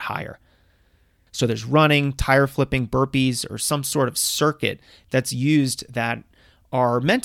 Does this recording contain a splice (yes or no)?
yes